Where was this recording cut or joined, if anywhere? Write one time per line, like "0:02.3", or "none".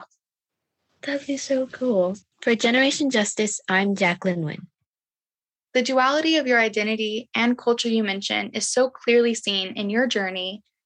0:02.3
0:05.7